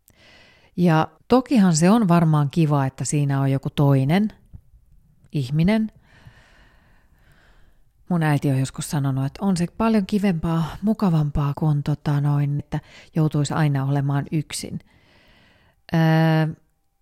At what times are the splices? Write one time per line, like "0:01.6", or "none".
0:01.2
0:11.5
0:12.6